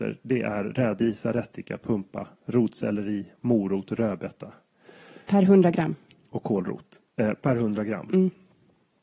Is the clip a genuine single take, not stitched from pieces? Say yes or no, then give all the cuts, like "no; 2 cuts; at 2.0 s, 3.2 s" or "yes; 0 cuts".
yes; 0 cuts